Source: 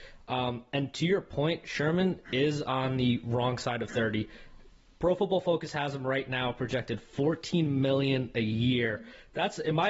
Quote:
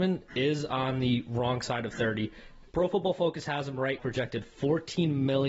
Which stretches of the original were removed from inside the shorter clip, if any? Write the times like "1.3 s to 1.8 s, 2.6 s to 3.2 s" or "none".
4.7 s to 5.0 s, 6.2 s to 6.5 s